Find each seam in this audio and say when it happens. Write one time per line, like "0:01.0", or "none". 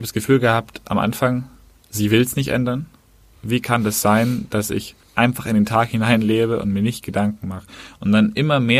0:03.3
0:05.0